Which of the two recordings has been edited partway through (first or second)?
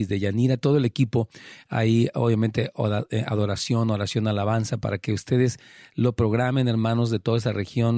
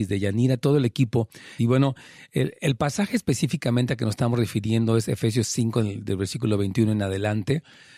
second